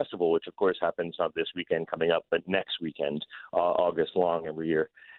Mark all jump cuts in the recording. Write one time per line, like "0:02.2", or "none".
none